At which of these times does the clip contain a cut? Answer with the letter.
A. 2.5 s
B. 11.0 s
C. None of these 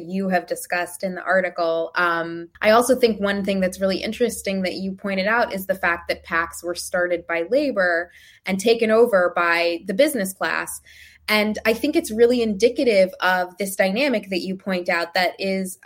A